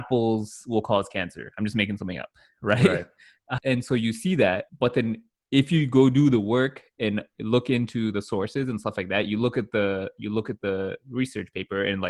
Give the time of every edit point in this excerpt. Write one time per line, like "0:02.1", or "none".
0:03.6
0:04.7

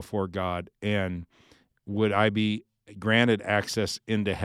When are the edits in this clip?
none

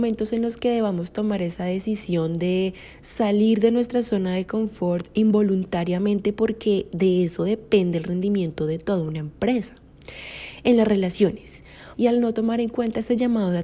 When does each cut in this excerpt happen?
0:11.9

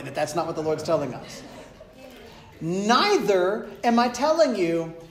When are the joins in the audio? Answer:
none

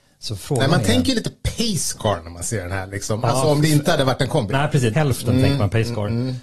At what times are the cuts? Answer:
0:04.9

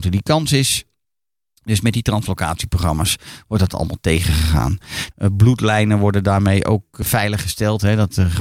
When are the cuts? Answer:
0:05.1
0:07.0

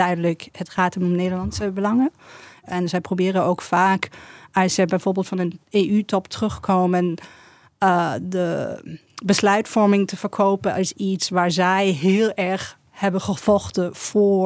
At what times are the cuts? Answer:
0:02.6

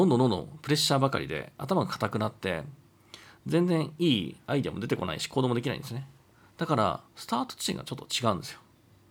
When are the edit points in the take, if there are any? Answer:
none

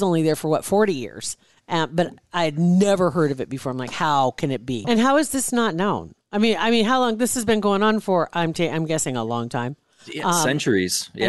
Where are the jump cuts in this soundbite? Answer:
0:04.8

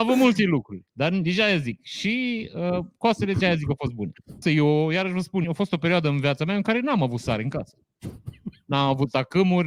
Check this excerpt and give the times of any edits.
0:04.4
0:05.4

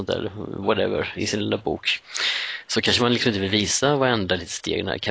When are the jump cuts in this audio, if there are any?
0:01.2

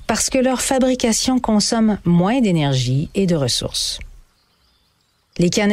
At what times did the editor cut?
none

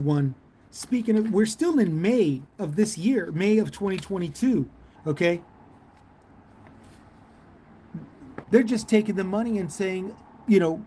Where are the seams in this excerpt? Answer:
0:05.0
0:08.4

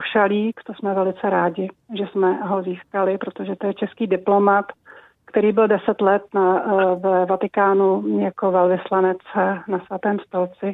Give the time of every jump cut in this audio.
none

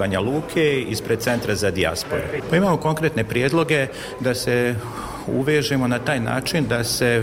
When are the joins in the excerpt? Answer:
0:02.4

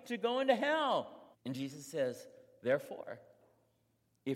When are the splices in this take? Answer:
0:01.3

